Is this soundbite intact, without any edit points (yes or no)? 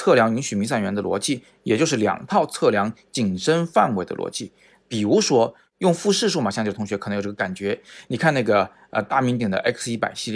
no